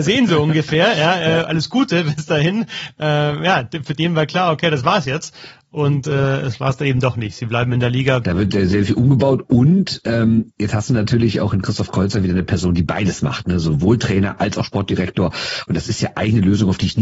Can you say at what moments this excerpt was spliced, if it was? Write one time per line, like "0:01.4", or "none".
0:08.2

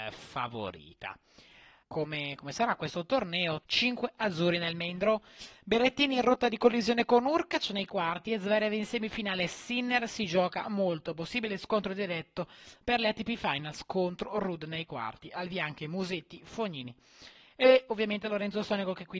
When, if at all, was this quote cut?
0:01.8
0:03.6

